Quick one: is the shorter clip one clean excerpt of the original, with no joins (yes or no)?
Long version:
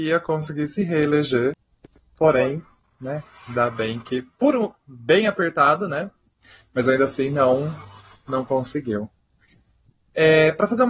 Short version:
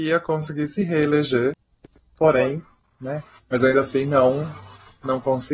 no